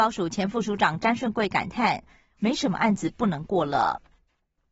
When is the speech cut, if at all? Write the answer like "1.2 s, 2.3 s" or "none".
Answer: 2.4 s